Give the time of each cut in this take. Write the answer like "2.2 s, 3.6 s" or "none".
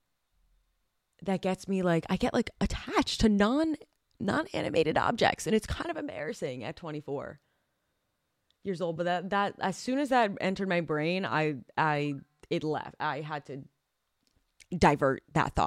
none